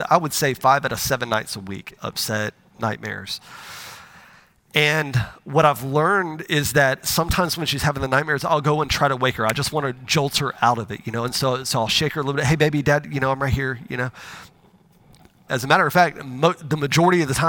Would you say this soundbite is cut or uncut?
cut